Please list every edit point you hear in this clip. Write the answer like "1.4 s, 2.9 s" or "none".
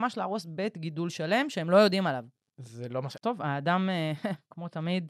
3.2 s